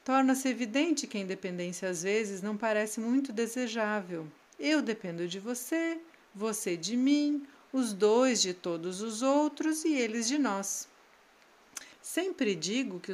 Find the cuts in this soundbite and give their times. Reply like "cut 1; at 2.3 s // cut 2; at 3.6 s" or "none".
cut 1; at 4.5 s // cut 2; at 11.9 s